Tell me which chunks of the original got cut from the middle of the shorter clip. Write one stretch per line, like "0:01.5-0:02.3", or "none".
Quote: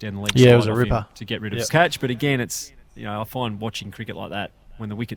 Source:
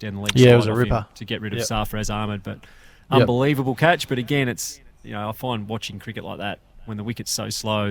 0:01.7-0:03.8